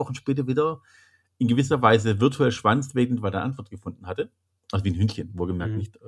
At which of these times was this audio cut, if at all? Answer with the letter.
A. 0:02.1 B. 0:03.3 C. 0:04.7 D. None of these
D